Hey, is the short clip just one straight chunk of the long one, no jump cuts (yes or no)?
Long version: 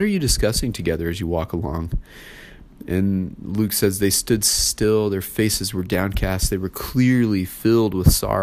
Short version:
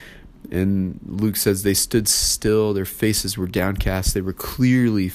yes